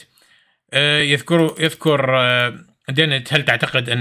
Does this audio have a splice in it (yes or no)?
no